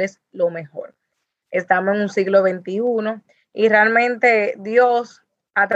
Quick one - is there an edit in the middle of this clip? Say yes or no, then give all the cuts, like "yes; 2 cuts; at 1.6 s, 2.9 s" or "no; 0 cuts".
yes; 1 cut; at 1.4 s